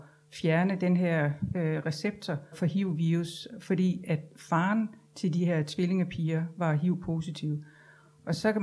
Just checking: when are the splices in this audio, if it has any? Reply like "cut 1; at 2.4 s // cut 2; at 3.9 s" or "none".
cut 1; at 2.5 s